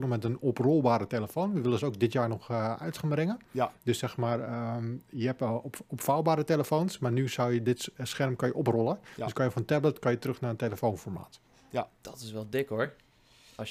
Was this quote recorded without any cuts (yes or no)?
yes